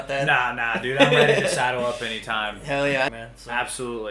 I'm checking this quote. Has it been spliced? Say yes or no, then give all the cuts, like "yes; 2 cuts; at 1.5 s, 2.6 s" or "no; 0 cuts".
yes; 1 cut; at 3.1 s